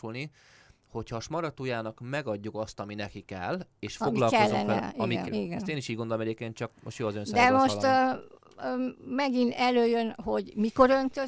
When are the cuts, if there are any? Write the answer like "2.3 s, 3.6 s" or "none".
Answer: 5.3 s